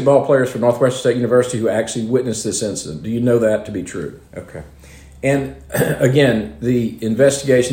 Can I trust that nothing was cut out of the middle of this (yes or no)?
no